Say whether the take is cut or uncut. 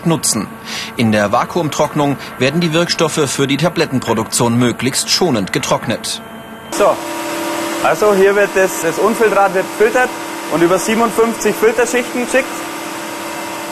cut